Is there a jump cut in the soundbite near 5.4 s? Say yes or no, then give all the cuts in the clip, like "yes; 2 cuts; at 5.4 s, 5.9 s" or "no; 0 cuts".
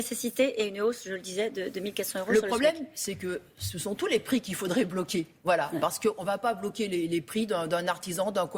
no; 0 cuts